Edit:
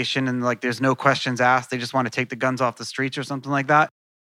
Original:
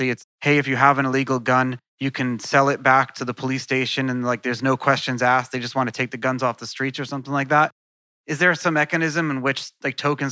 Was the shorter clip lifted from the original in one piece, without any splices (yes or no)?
yes